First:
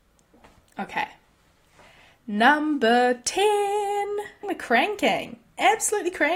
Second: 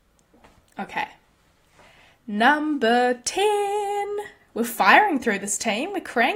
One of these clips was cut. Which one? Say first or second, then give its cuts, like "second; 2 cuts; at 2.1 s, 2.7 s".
first; 1 cut; at 4.4 s